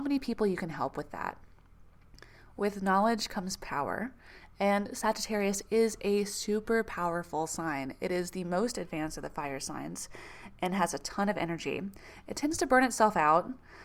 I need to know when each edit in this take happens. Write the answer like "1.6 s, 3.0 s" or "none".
none